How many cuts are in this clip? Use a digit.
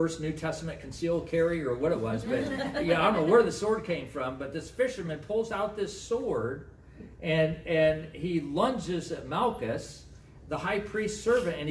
0